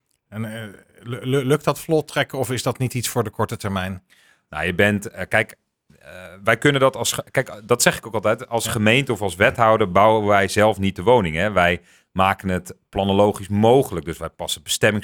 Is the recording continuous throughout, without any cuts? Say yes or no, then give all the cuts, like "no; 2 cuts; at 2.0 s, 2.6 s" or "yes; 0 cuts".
yes; 0 cuts